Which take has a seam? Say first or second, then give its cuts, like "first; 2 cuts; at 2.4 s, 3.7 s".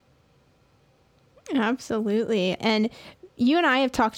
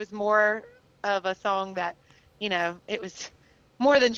first; 1 cut; at 2.6 s